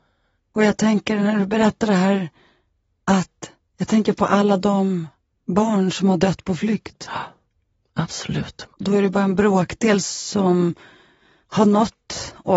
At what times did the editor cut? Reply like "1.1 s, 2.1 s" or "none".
8.7 s